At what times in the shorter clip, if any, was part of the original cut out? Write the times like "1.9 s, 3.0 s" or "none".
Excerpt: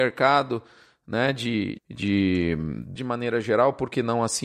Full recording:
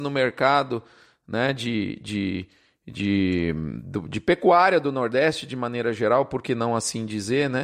1.8 s, 3.0 s